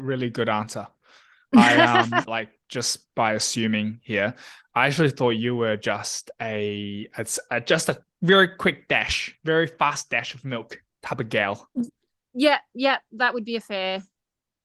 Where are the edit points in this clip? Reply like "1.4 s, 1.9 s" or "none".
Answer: 2.3 s